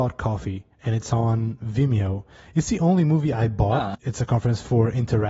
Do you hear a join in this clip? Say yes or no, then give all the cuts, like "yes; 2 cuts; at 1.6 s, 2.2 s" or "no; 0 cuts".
yes; 1 cut; at 3.9 s